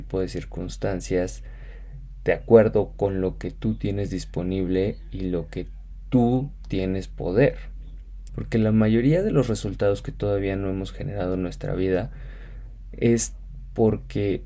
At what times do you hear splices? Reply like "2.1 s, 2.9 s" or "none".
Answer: 8.3 s